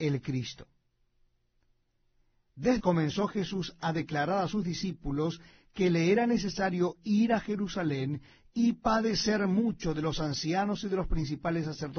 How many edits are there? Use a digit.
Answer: 1